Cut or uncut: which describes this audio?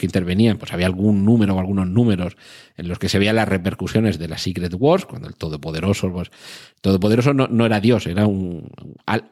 uncut